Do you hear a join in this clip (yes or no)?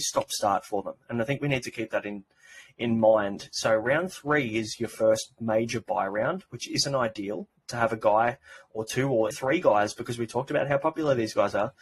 yes